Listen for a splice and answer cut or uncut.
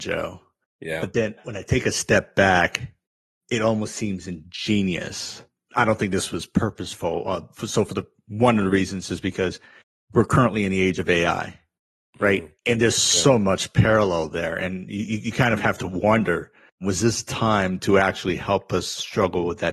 uncut